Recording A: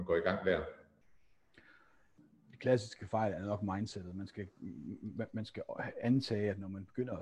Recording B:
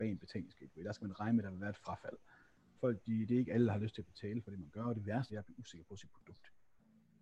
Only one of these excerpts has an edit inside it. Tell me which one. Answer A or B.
B